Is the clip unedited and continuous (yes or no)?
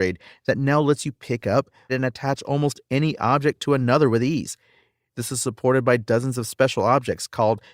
no